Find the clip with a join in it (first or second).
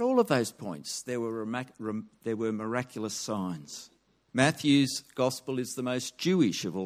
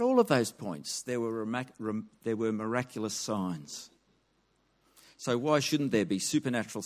first